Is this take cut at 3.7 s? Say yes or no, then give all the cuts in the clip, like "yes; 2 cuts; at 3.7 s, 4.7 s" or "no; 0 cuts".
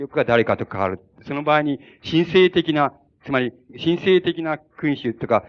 yes; 1 cut; at 3.7 s